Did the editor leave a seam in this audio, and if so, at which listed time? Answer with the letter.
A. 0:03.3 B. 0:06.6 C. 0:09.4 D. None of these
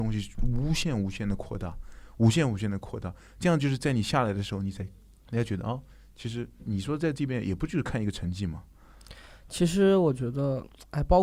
B